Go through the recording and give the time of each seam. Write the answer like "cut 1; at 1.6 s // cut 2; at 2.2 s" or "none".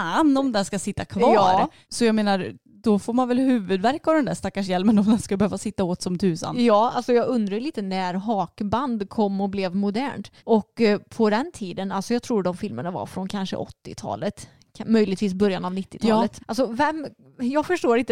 cut 1; at 10.4 s // cut 2; at 16.4 s